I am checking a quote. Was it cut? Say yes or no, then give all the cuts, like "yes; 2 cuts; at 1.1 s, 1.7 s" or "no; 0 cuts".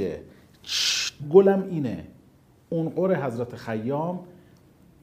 yes; 1 cut; at 1.2 s